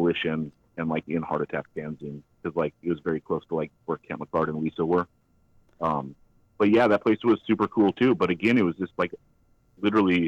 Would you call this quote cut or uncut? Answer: uncut